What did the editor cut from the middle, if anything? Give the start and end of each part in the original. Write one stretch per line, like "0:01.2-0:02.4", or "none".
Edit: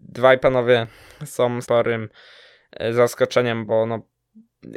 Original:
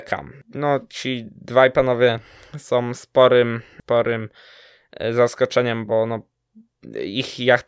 0:03.0-0:03.8